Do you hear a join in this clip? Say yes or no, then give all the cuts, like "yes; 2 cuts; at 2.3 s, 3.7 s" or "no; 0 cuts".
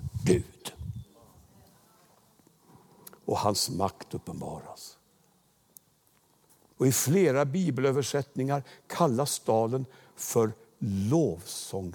yes; 1 cut; at 6.8 s